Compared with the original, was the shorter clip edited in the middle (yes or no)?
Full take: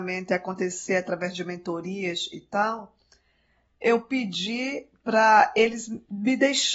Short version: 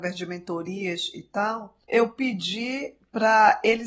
yes